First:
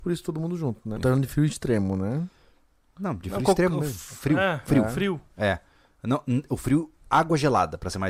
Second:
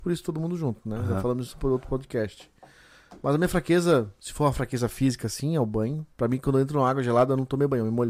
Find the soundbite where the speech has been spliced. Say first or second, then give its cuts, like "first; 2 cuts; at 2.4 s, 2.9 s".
first; 1 cut; at 1.0 s